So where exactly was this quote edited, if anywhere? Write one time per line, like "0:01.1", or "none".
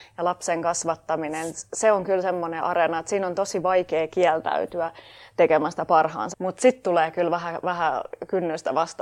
0:06.3